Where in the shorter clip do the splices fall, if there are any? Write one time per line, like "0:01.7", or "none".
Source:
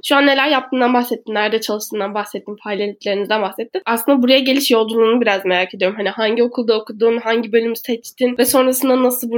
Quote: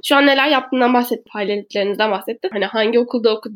0:01.3
0:02.5